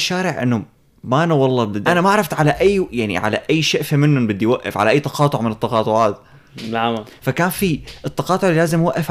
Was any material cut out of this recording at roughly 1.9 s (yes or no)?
yes